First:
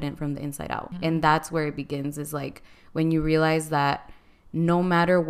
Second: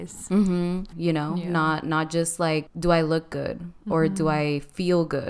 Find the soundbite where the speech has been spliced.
second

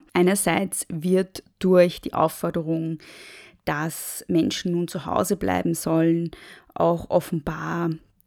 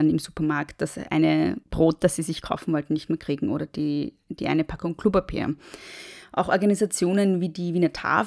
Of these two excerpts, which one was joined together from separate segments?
second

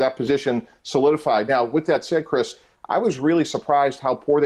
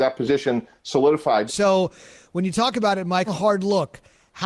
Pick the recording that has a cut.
second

